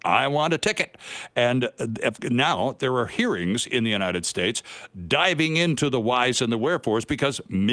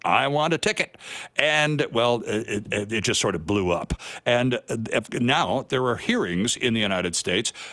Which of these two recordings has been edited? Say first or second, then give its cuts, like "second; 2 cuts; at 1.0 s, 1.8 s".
first; 1 cut; at 1.3 s